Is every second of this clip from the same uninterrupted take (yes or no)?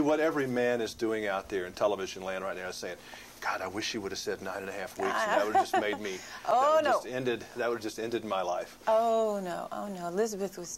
yes